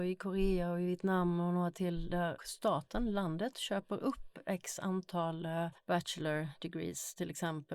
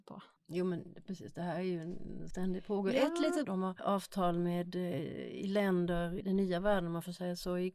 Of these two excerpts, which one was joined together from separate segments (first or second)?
second